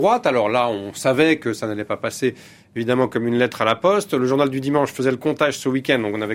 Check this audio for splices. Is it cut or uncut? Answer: uncut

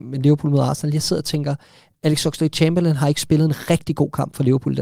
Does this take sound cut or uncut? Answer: uncut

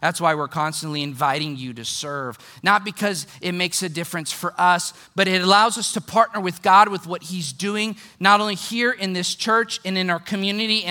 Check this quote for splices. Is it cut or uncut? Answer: uncut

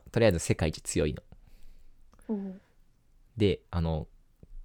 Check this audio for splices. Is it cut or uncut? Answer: uncut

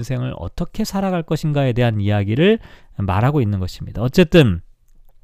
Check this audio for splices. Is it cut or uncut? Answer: cut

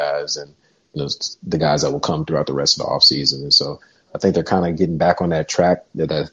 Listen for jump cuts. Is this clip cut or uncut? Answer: uncut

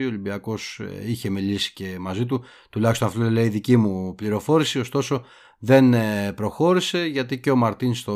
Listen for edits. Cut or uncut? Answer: uncut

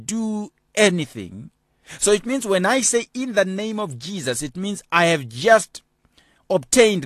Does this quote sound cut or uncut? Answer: uncut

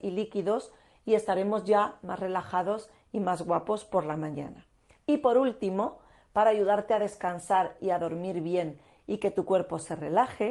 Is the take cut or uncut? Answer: uncut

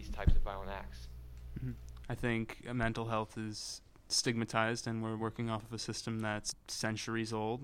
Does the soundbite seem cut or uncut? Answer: cut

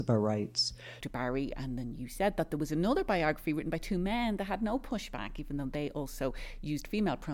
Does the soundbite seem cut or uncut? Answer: cut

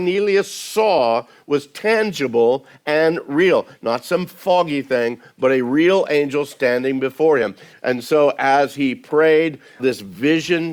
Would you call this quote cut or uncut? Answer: cut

